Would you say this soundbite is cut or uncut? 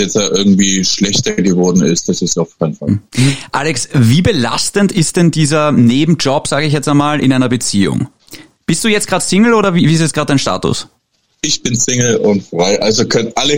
uncut